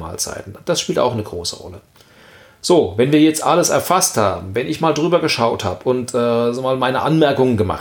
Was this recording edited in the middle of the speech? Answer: no; 0 cuts

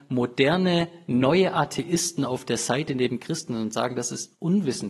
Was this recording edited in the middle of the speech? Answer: no; 0 cuts

